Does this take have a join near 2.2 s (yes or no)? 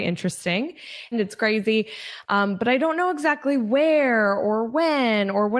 yes